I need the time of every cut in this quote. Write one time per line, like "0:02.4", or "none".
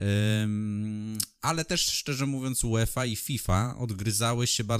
none